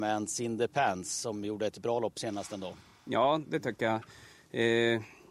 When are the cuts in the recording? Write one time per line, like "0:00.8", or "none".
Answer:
none

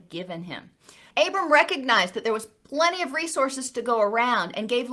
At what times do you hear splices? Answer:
0:01.1

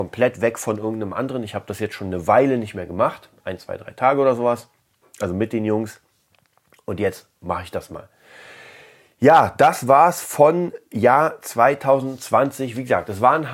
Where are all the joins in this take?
none

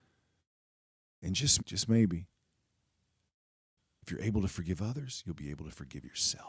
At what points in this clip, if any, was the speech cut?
0:01.6

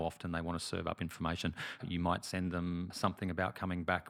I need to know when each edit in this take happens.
0:01.8

